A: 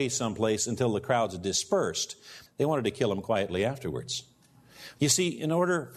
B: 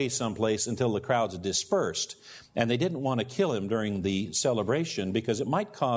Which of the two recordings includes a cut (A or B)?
A